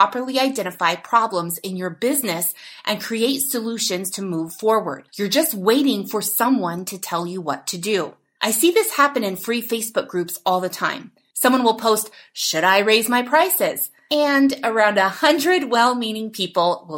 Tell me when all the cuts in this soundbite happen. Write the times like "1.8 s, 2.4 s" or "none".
5.1 s